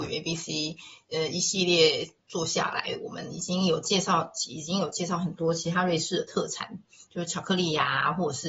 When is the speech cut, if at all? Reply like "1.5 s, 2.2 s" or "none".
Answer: none